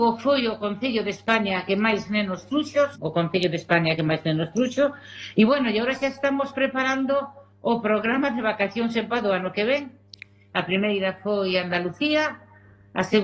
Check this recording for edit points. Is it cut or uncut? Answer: cut